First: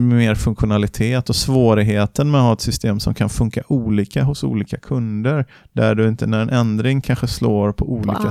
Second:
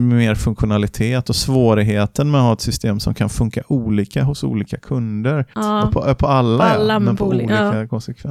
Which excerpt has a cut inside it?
second; 1 cut; at 5.5 s

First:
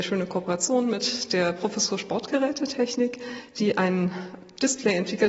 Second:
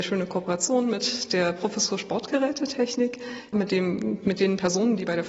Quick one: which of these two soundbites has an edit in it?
second; 1 cut; at 3.5 s

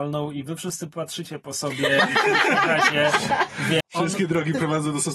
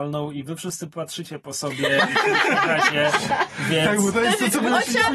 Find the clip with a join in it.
first; 1 cut; at 3.8 s

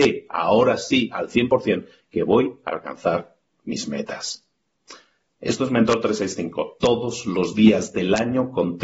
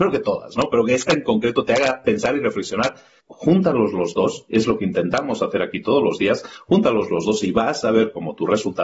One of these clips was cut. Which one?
second; 1 cut; at 3.2 s

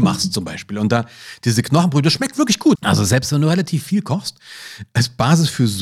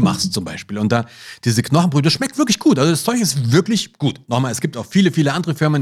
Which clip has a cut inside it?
first; 1 cut; at 2.8 s

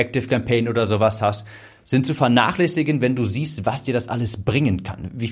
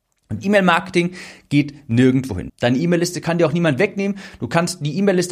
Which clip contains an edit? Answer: second; 1 cut; at 2.5 s

